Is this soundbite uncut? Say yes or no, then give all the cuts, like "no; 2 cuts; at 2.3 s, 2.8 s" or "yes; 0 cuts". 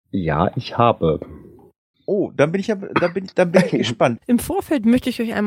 no; 2 cuts; at 1.9 s, 4.2 s